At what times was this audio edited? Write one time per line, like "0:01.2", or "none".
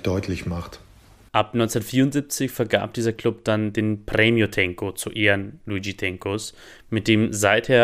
0:01.3

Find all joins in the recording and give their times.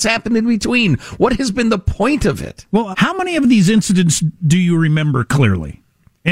0:02.9

